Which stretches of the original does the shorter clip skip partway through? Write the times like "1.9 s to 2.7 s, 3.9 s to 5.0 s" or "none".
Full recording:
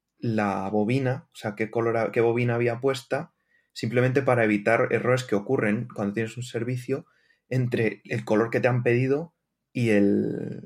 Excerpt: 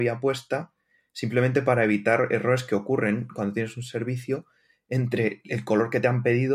none